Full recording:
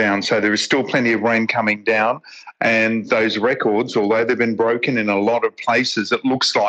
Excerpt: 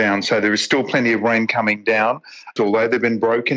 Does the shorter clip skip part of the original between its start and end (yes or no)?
yes